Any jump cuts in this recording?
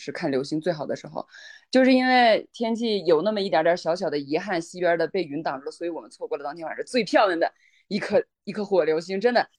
no; 0 cuts

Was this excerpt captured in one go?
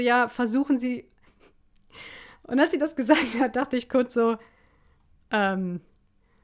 no; 1 cut; at 1.3 s

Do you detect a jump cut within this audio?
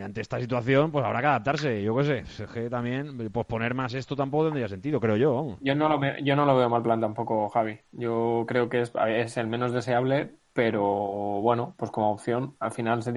no; 0 cuts

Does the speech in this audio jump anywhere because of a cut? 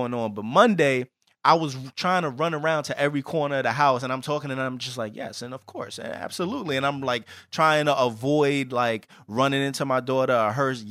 no; 0 cuts

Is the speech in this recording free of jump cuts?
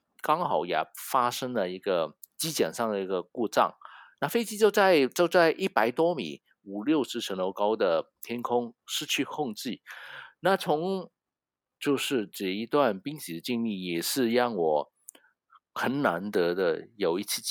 no; 1 cut; at 11.8 s

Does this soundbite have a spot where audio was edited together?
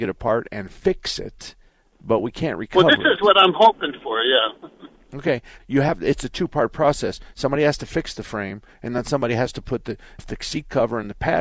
yes; 2 cuts; at 5.6 s, 10.2 s

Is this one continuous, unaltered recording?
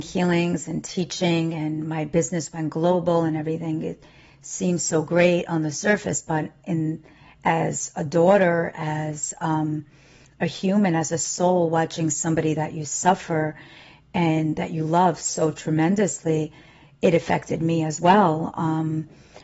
yes; 0 cuts

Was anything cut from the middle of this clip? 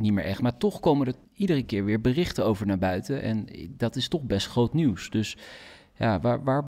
yes; 1 cut; at 1.2 s

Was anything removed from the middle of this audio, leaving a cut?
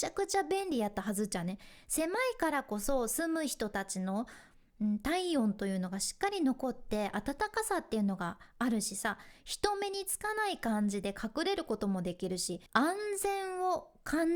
yes; 1 cut; at 12.7 s

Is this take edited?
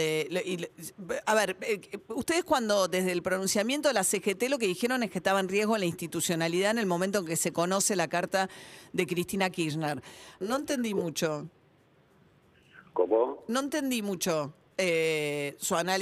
yes; 1 cut; at 10.4 s

